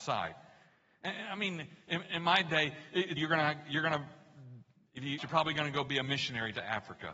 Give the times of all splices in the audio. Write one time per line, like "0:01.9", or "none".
0:02.0
0:03.2
0:05.2